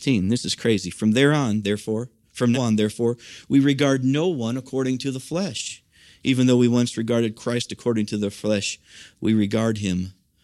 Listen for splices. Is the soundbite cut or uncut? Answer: cut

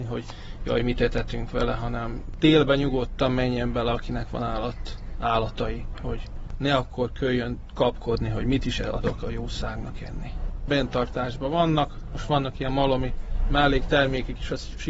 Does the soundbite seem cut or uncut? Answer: uncut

